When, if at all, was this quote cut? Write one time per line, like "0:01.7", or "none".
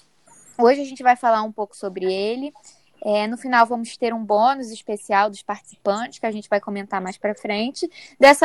none